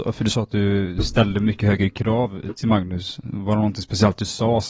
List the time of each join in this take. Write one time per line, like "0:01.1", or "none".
none